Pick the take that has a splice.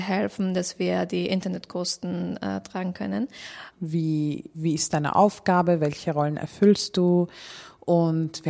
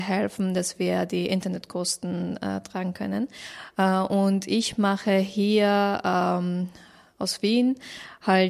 first; 1 cut; at 3.7 s

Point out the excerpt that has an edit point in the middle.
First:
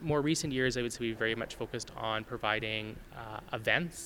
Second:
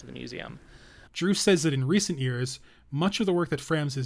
second; 1 cut; at 1.1 s

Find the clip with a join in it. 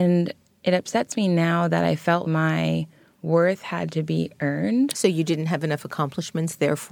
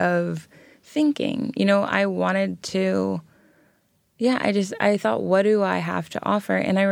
first; 1 cut; at 2.2 s

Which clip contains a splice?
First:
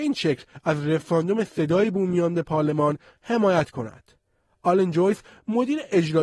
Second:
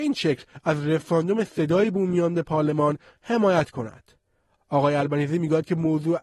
second; 1 cut; at 4.5 s

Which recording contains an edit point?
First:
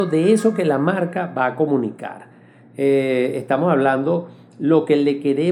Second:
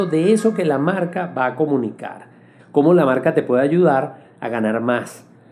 second; 1 cut; at 2.6 s

